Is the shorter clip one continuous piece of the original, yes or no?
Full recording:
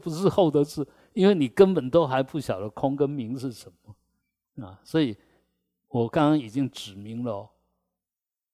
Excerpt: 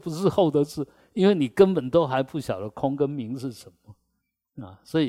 yes